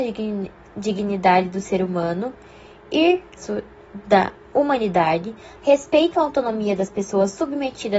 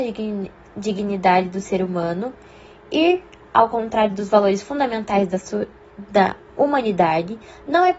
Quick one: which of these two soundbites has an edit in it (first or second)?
first